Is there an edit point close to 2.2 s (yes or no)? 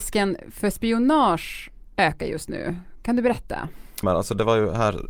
no